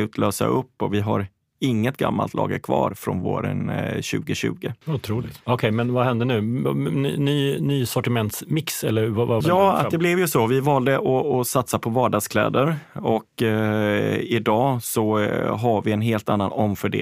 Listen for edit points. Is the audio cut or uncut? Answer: cut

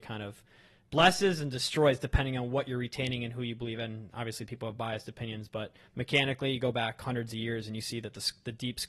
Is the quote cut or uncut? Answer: cut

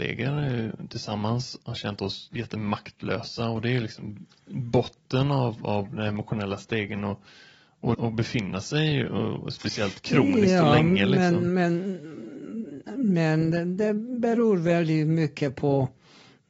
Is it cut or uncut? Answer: cut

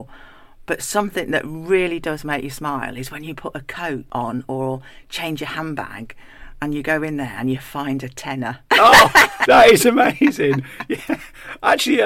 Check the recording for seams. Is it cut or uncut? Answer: cut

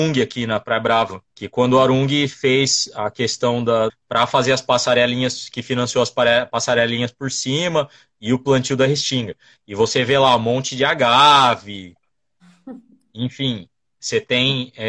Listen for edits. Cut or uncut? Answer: cut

